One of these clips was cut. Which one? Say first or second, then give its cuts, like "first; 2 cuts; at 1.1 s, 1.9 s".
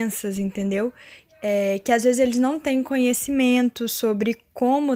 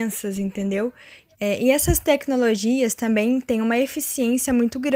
second; 1 cut; at 1.3 s